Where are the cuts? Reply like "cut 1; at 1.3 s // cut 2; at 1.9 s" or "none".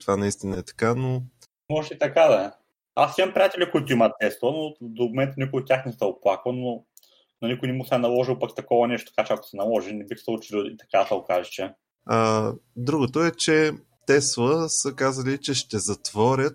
cut 1; at 12.0 s